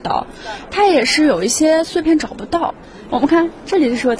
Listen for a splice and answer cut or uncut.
cut